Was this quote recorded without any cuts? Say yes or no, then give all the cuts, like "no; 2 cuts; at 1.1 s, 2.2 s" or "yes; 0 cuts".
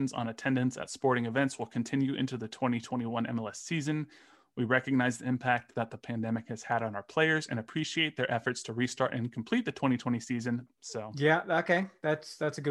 no; 1 cut; at 10.7 s